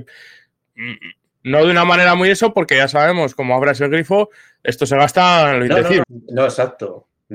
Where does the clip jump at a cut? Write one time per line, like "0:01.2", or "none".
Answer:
0:01.3
0:06.0